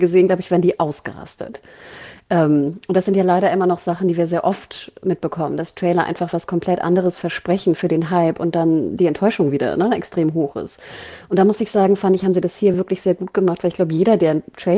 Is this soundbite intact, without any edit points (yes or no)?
yes